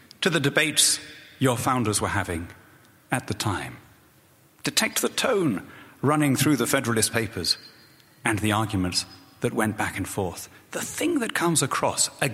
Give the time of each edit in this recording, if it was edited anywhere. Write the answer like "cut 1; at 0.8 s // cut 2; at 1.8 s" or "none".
none